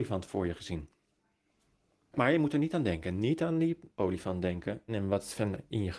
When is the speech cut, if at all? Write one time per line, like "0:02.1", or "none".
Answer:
0:04.9